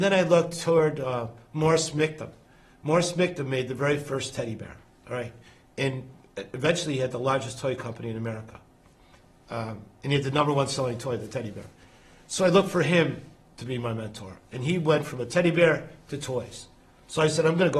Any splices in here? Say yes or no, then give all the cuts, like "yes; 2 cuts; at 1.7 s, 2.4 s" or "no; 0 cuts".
no; 0 cuts